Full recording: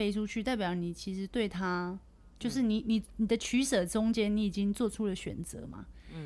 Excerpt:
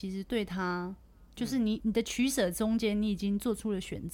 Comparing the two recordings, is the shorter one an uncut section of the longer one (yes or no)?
no